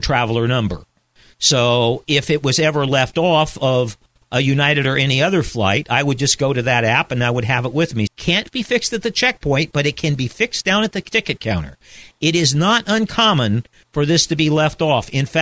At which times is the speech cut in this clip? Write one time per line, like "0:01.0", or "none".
0:08.1